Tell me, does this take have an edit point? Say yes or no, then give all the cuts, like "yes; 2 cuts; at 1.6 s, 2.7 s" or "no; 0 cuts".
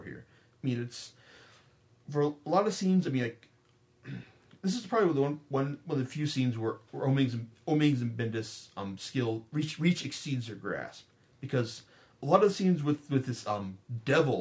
no; 0 cuts